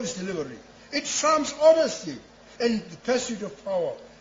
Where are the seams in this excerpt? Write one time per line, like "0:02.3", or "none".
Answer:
0:02.6